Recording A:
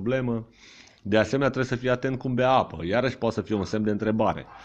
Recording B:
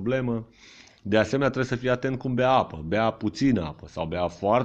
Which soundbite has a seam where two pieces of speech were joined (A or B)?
A